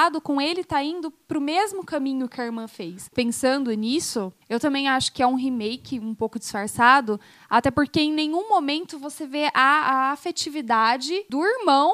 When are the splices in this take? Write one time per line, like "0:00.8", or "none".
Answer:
0:03.1